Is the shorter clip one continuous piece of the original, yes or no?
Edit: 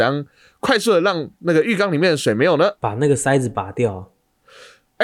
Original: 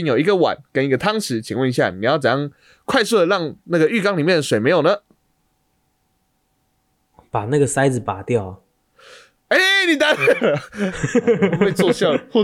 no